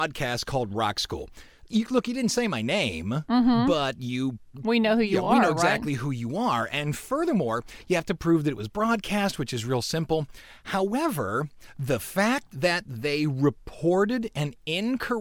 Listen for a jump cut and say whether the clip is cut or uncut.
uncut